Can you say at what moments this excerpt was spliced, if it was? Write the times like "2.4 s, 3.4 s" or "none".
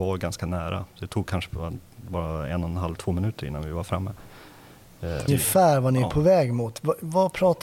5.3 s